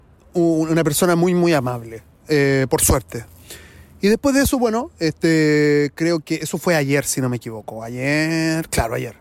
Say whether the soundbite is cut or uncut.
uncut